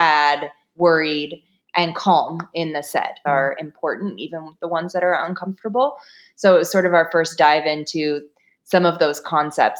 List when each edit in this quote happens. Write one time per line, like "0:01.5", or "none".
0:03.2